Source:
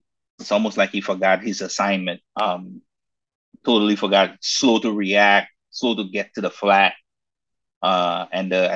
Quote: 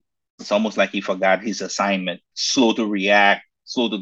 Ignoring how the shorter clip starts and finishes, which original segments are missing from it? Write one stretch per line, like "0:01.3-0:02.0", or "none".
0:02.3-0:04.4